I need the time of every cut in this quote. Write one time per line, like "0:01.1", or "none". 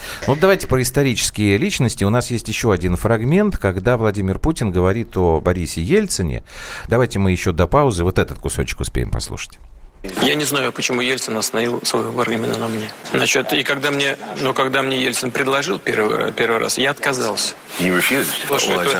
0:06.9